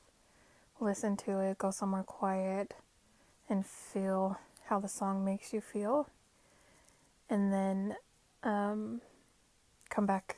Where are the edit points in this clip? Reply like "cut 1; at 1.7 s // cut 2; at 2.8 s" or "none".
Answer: none